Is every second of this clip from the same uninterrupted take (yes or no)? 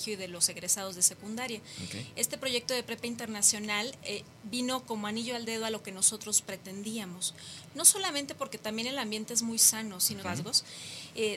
no